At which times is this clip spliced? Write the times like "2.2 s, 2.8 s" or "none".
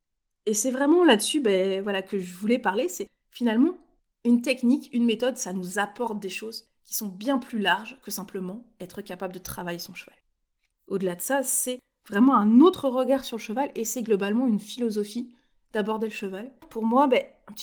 10.7 s, 16.6 s